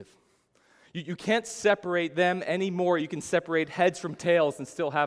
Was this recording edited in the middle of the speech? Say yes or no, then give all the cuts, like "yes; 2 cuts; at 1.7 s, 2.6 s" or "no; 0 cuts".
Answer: no; 0 cuts